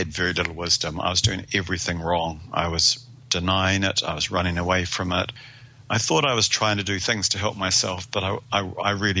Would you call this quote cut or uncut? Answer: uncut